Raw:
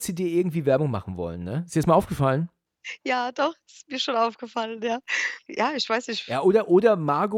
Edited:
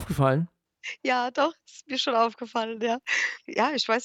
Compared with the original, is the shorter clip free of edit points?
yes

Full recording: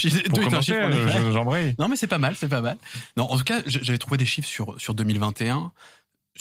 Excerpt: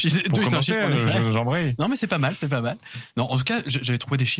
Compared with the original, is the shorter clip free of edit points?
yes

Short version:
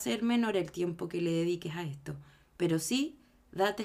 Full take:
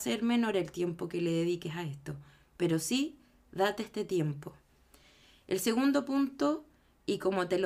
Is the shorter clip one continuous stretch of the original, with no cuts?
yes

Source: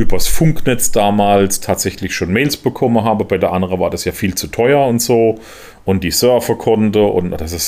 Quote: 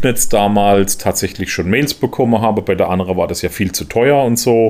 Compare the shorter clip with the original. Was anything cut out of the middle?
no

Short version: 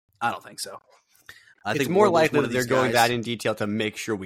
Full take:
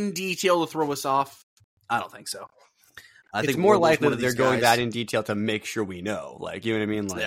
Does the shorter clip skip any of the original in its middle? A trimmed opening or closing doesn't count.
no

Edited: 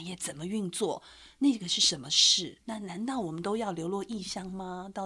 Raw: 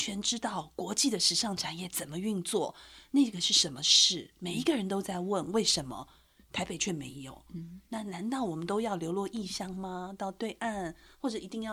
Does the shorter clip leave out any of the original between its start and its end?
yes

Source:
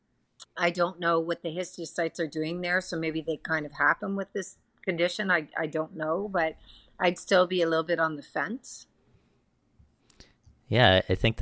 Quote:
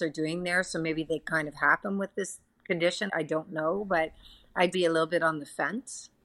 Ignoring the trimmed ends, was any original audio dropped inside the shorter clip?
yes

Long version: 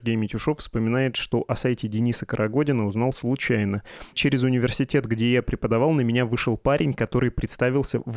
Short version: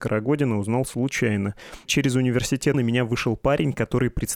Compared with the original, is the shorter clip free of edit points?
no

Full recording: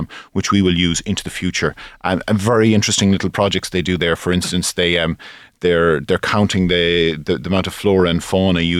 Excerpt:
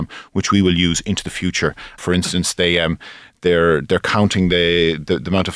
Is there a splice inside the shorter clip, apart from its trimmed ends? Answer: yes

